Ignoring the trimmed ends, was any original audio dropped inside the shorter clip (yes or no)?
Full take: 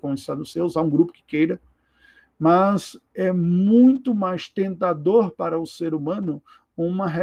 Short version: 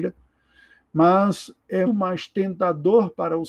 yes